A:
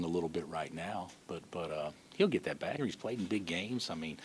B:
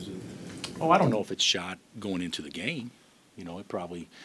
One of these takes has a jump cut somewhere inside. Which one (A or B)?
A